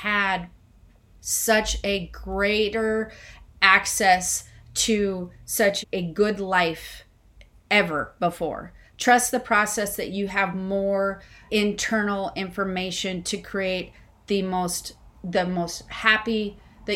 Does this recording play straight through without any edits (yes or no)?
no